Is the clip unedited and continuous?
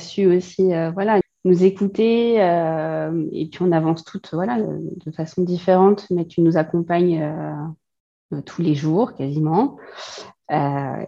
no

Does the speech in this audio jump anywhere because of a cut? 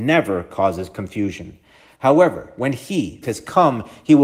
yes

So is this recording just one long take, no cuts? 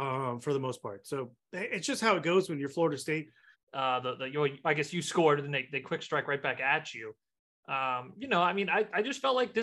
no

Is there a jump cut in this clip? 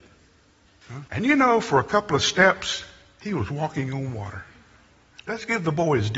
yes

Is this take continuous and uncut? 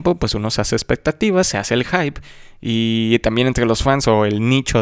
yes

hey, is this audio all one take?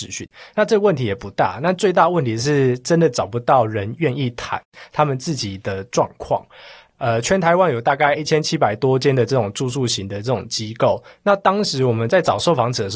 yes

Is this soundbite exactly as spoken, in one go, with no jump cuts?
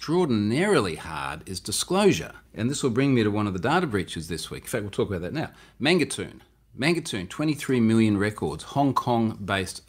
no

